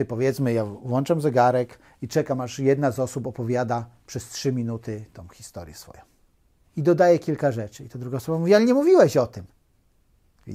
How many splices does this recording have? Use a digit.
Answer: 1